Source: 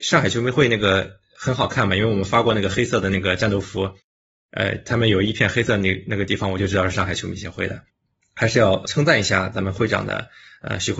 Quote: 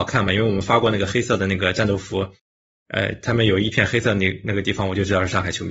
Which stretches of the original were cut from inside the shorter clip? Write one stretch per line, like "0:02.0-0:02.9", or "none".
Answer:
none

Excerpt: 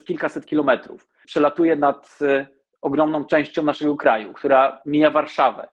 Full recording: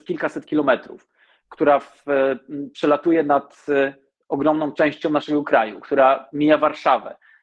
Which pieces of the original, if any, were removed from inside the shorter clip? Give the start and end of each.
0:01.2-0:02.7

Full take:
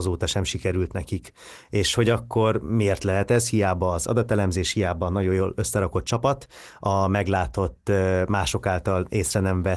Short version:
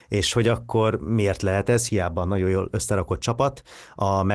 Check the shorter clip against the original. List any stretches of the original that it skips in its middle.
0:03.5-0:04.7

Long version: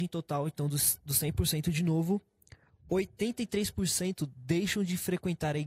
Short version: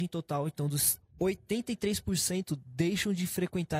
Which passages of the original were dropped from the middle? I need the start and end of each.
0:01.0-0:02.7

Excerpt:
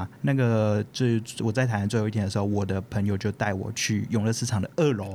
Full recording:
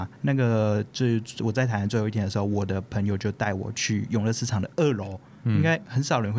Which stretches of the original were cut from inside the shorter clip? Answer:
none

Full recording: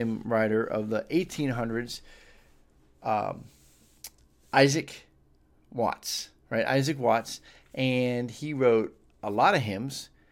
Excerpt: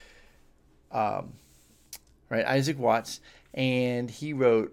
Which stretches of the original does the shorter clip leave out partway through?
0:04.3-0:06.4

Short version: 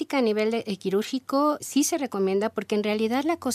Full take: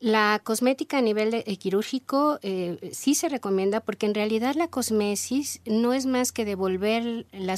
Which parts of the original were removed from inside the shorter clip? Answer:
0:02.4-0:02.9

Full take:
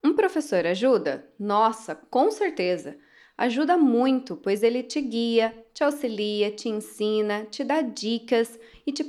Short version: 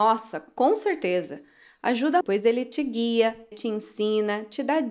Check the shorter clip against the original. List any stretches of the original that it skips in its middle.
0:03.8-0:04.4
0:05.7-0:06.5

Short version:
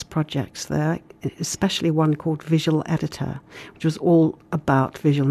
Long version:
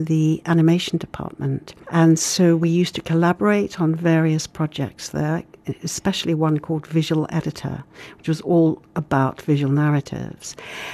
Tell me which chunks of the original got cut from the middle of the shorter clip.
none

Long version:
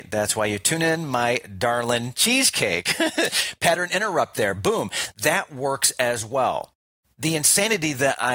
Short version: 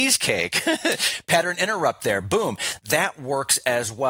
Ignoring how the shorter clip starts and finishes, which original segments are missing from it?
none

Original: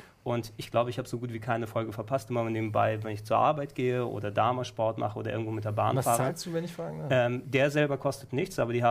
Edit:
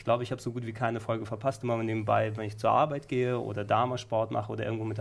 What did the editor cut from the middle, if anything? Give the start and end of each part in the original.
none

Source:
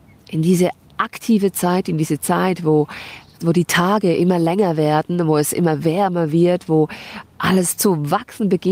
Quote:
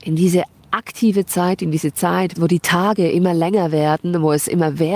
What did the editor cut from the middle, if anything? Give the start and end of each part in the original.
0:02.6-0:03.4

